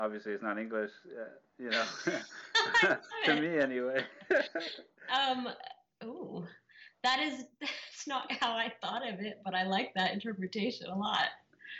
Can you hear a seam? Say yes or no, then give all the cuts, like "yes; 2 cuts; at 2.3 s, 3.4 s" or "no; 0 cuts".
yes; 1 cut; at 8.3 s